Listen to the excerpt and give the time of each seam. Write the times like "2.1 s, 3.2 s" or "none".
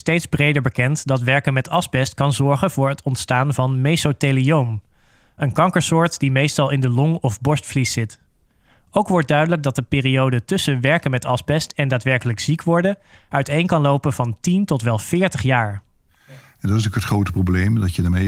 none